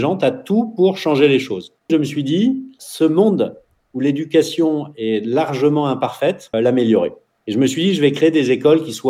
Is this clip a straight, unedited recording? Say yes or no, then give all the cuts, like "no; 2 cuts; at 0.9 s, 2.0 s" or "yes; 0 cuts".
no; 2 cuts; at 1.9 s, 6.5 s